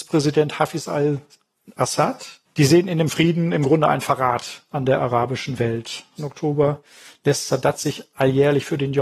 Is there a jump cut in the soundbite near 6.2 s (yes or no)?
yes